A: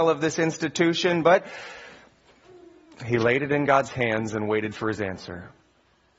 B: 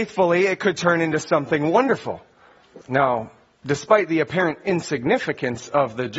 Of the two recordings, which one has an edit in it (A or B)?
B